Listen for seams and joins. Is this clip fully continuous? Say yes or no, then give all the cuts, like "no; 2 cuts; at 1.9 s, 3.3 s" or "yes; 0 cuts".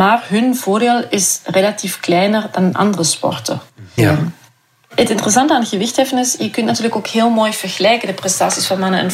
no; 1 cut; at 4.0 s